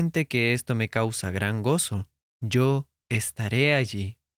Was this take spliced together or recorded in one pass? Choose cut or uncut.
cut